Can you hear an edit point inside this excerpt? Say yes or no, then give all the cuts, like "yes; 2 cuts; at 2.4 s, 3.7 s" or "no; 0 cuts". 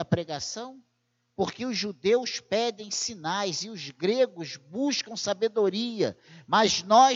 no; 0 cuts